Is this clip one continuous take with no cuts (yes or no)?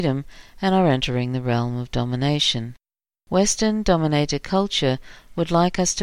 no